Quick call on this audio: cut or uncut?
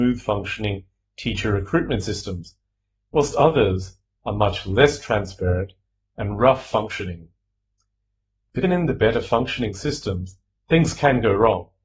cut